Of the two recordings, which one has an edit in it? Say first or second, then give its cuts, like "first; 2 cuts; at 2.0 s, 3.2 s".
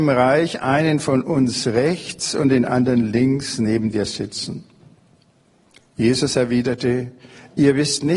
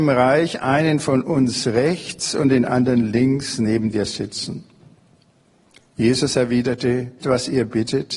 second; 1 cut; at 7.2 s